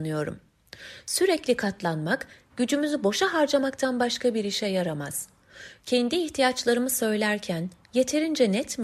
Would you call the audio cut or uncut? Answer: cut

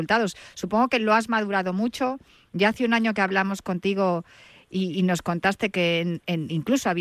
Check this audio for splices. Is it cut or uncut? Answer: uncut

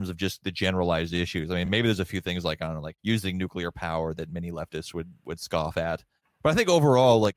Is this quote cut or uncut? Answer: uncut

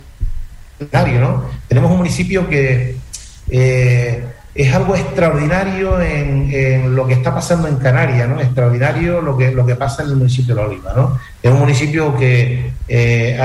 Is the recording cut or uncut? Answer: uncut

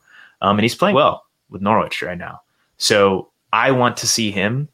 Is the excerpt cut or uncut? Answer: cut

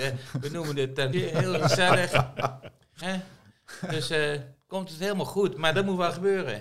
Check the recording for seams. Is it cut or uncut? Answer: cut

